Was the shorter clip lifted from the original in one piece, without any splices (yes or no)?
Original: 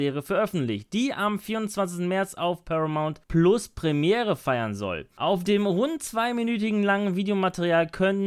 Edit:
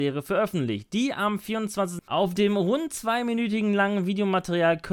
no